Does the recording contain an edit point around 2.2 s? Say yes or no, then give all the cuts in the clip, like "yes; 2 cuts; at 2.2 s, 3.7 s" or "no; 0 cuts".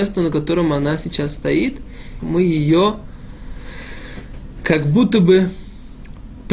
yes; 1 cut; at 2.2 s